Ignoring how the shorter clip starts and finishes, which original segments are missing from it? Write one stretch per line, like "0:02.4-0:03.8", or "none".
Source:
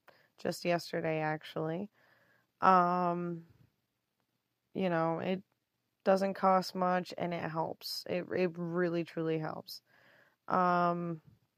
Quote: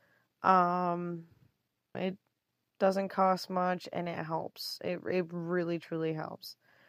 0:04.1-0:05.2